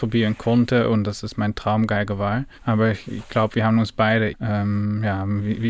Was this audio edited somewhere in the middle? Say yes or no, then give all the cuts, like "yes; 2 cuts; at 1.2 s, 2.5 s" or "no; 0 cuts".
yes; 2 cuts; at 2.6 s, 4.3 s